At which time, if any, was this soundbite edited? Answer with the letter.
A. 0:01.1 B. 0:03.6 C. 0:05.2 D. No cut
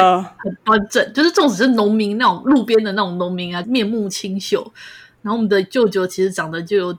B